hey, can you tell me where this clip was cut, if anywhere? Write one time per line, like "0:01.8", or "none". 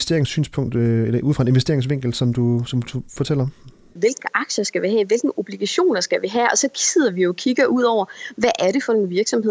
0:04.0